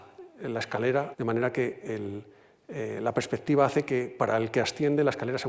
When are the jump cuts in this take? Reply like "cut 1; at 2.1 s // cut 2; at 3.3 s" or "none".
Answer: cut 1; at 1.1 s

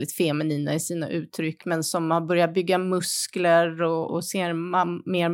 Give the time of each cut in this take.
cut 1; at 4.1 s

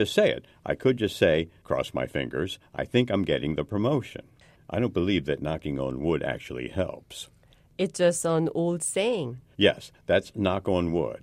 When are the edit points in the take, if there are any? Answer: cut 1; at 1.6 s // cut 2; at 4.6 s // cut 3; at 9.5 s

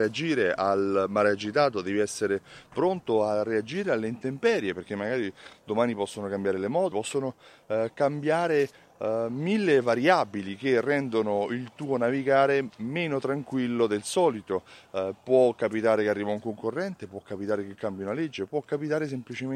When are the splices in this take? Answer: cut 1; at 6.9 s

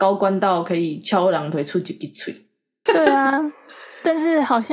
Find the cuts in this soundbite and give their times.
cut 1; at 2.9 s

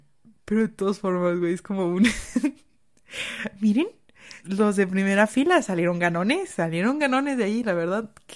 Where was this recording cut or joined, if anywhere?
cut 1; at 4.4 s

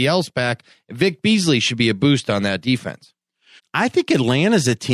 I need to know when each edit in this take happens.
cut 1; at 3.6 s

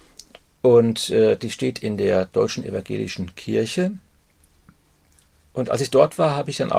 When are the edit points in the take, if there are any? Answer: none

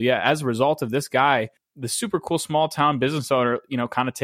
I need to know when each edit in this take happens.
cut 1; at 1.6 s

